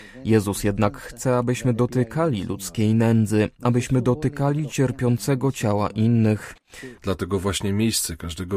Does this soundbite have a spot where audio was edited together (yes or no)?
yes